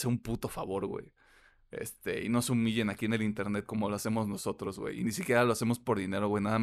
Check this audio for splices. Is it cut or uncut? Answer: uncut